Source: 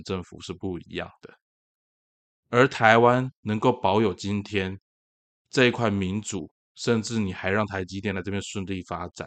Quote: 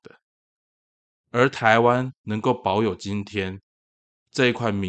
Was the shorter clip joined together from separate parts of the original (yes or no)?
no